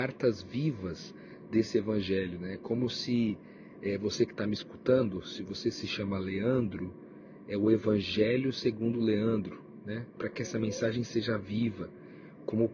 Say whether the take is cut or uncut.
cut